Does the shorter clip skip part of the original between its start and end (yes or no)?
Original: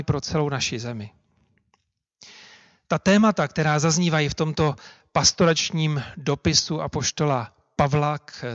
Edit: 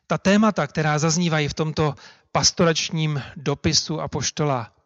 no